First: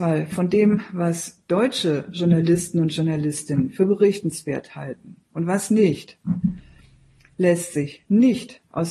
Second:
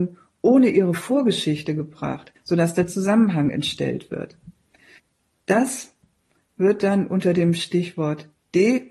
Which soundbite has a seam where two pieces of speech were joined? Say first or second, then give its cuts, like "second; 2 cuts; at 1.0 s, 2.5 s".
second; 1 cut; at 2.4 s